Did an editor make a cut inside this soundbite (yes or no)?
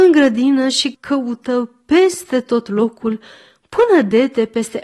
yes